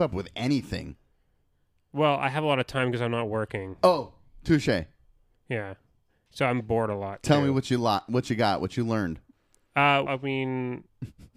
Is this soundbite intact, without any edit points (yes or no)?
no